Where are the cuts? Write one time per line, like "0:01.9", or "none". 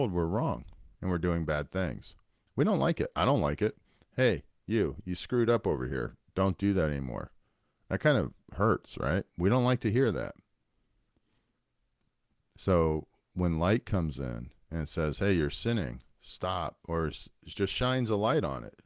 none